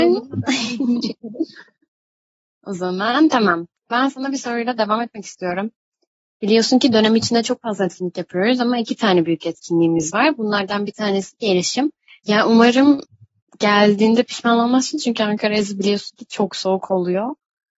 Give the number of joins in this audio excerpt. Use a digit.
1